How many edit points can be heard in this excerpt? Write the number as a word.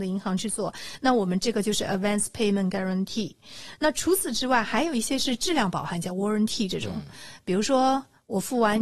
zero